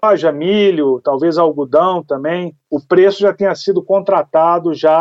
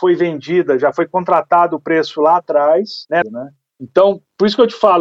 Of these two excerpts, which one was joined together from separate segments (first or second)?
second